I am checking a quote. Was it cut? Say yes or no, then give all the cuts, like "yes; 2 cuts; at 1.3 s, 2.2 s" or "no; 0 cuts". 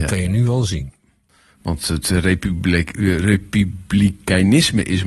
no; 0 cuts